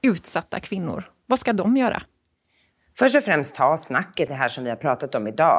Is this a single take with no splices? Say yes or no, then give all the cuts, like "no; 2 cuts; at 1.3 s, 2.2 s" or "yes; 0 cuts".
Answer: no; 1 cut; at 4.3 s